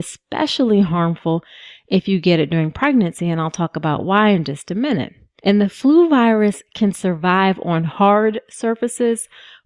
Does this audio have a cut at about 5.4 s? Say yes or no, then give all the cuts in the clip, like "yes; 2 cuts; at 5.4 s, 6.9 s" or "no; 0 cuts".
yes; 1 cut; at 5.4 s